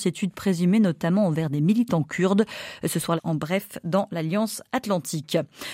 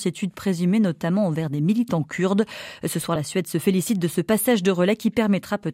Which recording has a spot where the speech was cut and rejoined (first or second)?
first